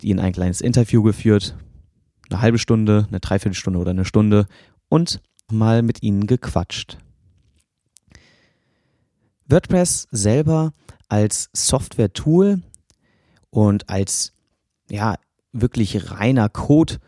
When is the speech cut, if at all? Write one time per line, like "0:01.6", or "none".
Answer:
0:05.5